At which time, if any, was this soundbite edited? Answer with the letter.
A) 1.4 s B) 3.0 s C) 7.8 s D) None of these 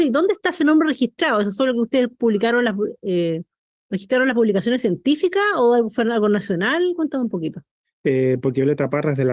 C